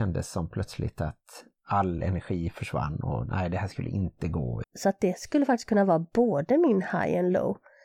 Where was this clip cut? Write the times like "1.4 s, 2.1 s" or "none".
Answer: 4.6 s